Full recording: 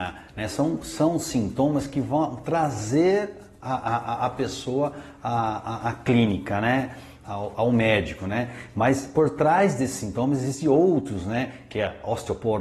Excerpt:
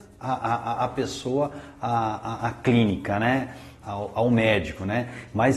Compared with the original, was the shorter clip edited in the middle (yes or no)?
no